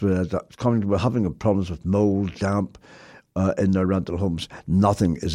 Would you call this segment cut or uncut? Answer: uncut